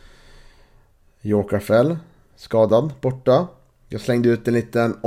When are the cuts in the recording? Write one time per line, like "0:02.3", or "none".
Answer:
none